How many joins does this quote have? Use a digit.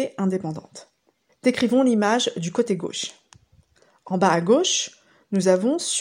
1